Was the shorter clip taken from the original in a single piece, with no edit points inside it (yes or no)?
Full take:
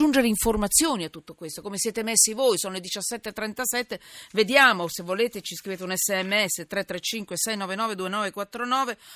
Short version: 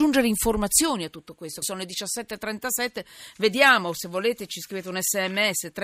no